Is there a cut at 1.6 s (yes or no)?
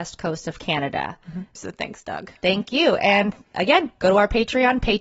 yes